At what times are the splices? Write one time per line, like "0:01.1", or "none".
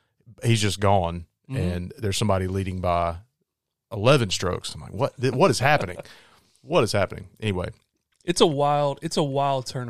none